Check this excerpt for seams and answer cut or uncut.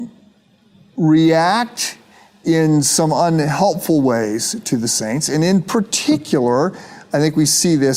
uncut